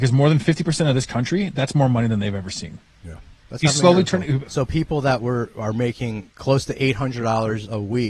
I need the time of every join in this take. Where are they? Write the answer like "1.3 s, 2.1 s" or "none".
3.4 s, 4.5 s